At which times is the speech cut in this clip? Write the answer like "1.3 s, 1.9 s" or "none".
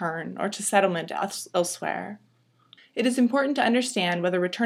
2.8 s